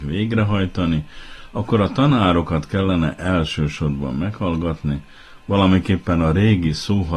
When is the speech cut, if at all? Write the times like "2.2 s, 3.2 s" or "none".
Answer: 5.4 s